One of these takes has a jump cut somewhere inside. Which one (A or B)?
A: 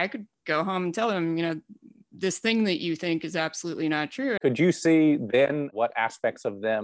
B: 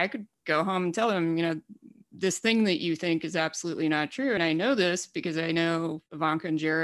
A